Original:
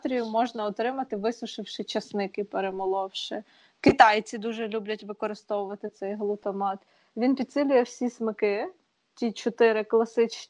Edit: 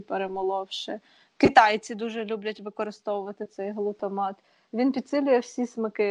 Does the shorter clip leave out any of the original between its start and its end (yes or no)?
no